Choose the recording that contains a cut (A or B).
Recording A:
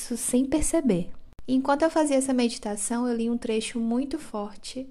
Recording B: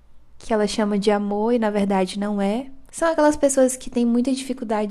B